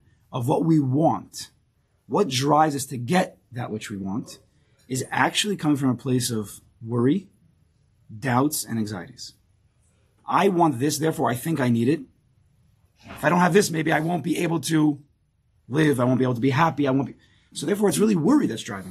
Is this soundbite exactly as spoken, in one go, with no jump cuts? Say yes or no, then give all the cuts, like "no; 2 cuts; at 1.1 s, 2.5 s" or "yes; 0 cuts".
no; 2 cuts; at 10.2 s, 12.9 s